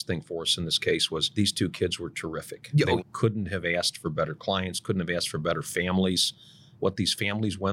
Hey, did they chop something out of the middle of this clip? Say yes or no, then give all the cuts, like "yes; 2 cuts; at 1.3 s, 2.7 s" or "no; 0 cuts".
yes; 1 cut; at 3.0 s